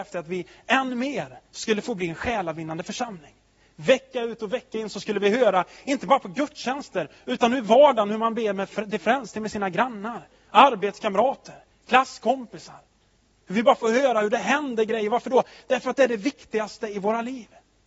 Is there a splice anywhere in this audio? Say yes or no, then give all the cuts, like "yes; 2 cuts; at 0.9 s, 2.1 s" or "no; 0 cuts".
no; 0 cuts